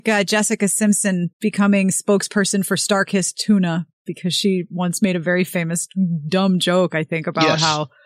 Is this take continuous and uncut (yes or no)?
no